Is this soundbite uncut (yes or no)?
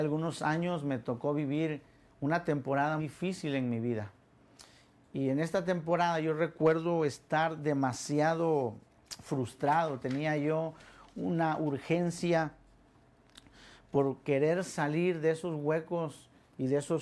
no